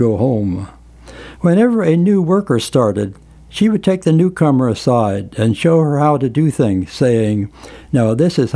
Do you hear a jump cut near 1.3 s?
yes; 1 cut; at 1.3 s

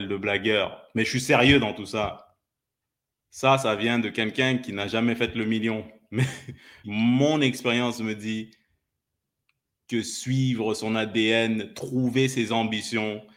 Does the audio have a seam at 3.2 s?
yes; 2 cuts; at 3.2 s, 6.8 s

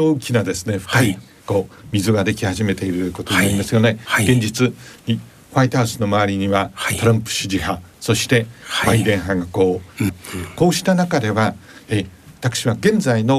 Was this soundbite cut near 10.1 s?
yes; 1 cut; at 10.1 s

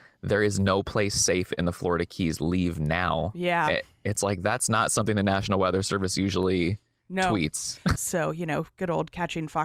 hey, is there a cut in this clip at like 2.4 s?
no; 1 cut; at 8.0 s

